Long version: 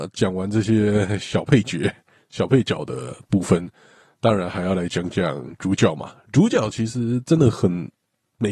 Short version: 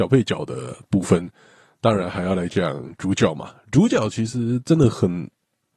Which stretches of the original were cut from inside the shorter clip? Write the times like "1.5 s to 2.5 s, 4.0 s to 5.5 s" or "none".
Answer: 4.9 s to 5.1 s